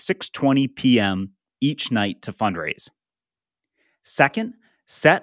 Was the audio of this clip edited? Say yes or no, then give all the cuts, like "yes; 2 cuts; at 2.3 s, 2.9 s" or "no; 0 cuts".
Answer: no; 0 cuts